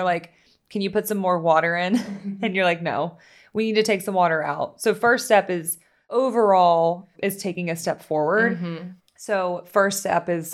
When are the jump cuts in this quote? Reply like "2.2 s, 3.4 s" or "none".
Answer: 7.1 s, 9.0 s